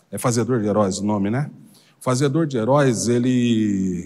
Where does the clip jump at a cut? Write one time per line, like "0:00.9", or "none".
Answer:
none